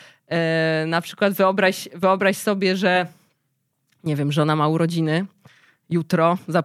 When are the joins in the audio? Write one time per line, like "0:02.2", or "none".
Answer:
none